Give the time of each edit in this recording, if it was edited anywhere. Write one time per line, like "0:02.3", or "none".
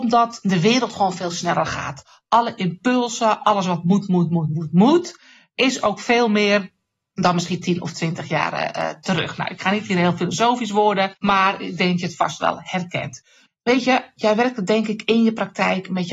0:11.2
0:13.5

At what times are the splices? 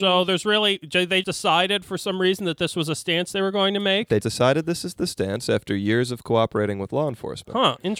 0:01.2
0:04.2

